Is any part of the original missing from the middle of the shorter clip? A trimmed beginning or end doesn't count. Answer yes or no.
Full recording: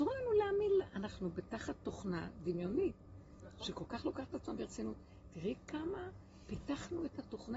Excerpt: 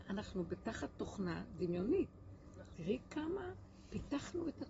yes